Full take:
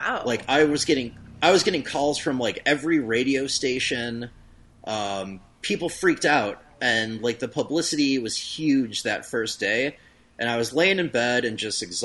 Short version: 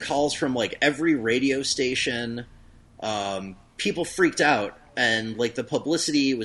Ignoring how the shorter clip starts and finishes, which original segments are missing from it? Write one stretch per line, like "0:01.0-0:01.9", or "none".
none